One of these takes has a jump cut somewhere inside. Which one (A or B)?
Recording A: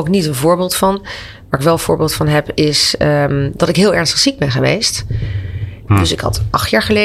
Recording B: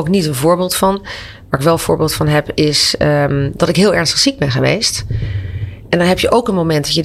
A